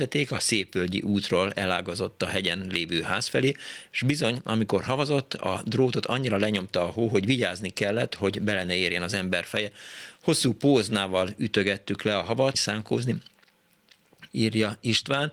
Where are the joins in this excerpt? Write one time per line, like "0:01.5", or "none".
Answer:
0:12.5
0:14.3